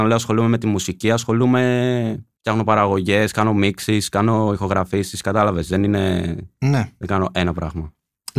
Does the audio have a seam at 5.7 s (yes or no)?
no